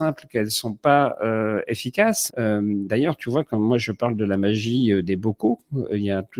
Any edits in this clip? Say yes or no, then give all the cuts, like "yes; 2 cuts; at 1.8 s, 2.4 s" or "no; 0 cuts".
yes; 1 cut; at 2.3 s